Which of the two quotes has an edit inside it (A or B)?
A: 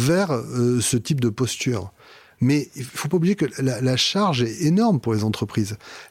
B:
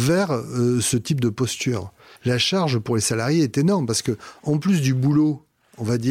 B